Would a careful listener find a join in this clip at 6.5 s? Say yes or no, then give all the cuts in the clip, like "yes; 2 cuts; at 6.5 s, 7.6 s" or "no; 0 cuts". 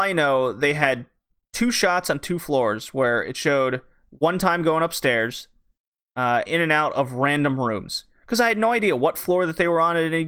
yes; 1 cut; at 6.5 s